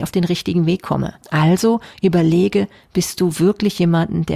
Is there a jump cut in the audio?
yes; 1 cut; at 1.2 s

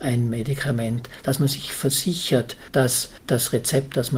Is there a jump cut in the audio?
no; 0 cuts

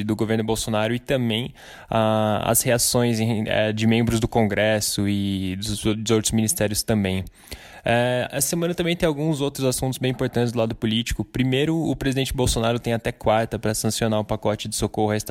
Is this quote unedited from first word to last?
yes; 0 cuts

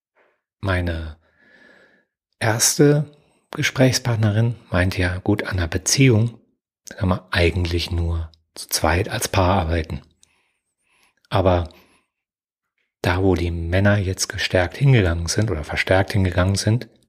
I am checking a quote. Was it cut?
no; 0 cuts

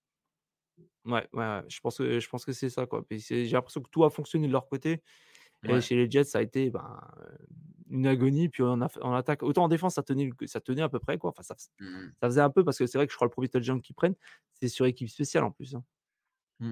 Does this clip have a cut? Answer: no; 0 cuts

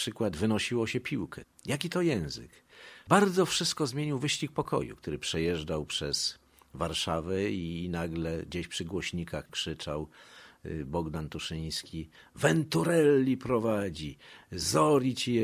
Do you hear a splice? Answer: yes; 1 cut; at 1.5 s

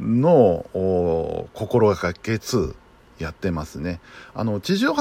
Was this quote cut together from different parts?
yes; 1 cut; at 2.4 s

